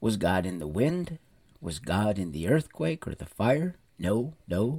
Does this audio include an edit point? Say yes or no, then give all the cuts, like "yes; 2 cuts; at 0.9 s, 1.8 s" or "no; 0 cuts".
no; 0 cuts